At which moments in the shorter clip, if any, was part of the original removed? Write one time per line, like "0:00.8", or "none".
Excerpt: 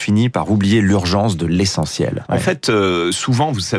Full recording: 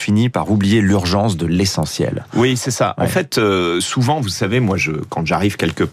0:02.3